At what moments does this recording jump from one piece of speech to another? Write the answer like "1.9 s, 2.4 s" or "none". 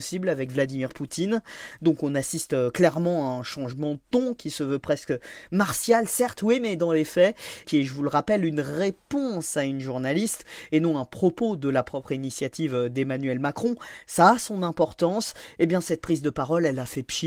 7.6 s